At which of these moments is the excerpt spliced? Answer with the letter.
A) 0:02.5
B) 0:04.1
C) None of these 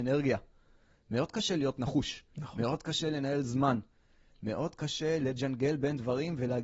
C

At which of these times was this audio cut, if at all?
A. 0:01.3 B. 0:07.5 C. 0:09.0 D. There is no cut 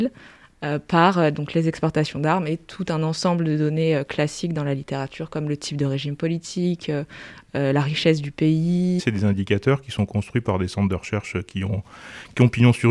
C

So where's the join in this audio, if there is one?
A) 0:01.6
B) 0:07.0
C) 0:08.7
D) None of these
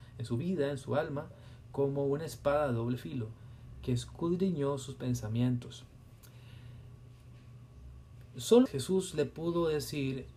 C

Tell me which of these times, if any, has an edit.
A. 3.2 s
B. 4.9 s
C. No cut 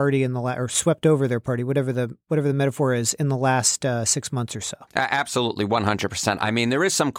B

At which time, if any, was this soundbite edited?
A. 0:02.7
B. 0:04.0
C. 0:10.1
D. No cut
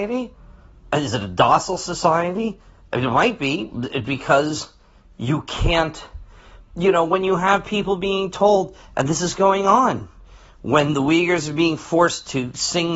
B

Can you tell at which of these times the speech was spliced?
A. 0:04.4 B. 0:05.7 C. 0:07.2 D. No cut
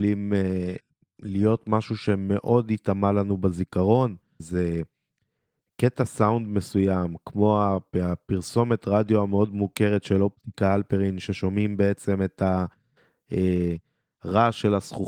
A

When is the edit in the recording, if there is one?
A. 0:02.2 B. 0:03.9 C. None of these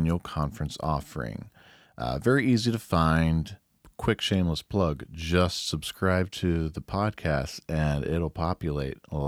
C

